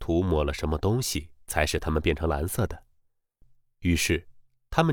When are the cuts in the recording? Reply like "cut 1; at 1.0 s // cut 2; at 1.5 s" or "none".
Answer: none